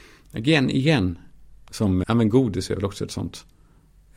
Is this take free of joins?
no; 1 cut; at 2.0 s

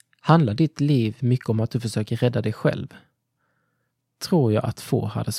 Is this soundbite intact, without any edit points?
yes; 0 cuts

